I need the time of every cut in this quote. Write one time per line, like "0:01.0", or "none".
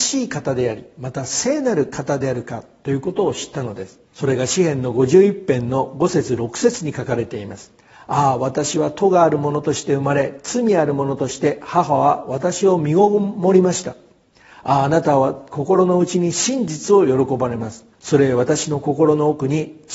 0:04.1
0:17.9